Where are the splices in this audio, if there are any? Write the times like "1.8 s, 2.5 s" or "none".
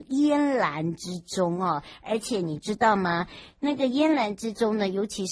none

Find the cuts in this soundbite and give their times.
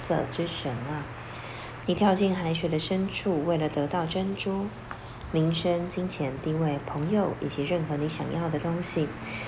1.8 s

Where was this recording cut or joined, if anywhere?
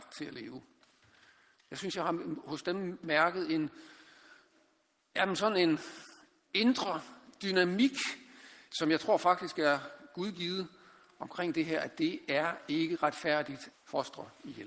8.7 s, 13.7 s

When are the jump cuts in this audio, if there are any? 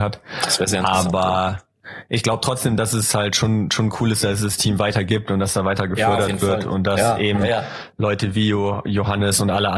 none

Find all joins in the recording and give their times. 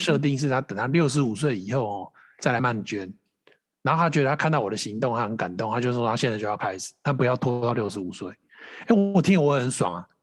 2.6 s

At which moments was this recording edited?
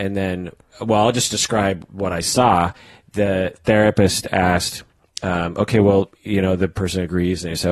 none

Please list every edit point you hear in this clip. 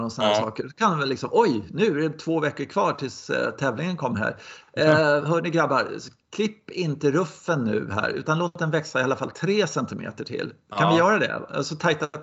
none

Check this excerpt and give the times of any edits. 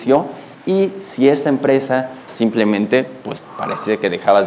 2.3 s

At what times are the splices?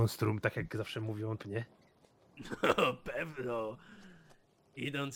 1.4 s

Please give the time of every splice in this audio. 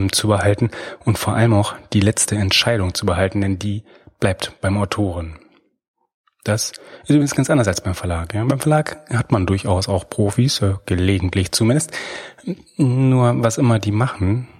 none

